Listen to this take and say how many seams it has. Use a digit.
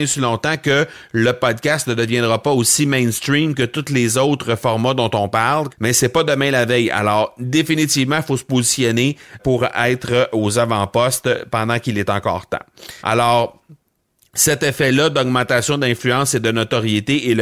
3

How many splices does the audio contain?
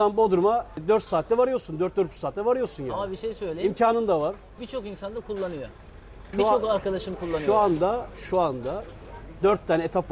2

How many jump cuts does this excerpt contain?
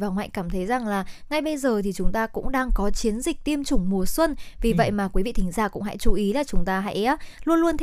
0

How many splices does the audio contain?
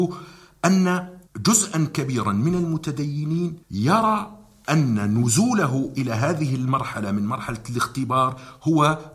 2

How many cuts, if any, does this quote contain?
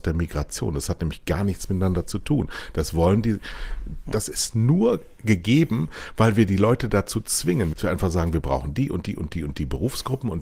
2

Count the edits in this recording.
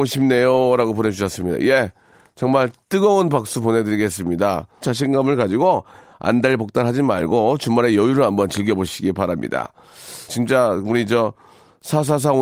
2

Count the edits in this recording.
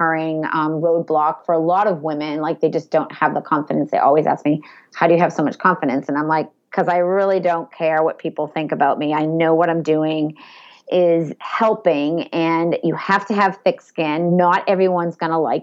0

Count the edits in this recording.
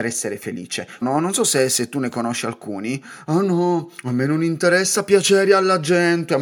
1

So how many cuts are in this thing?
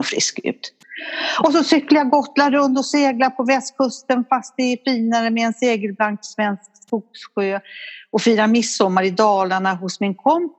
0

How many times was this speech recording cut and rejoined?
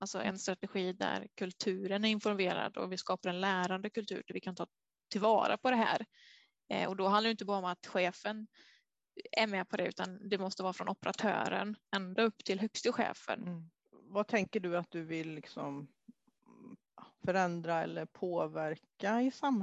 2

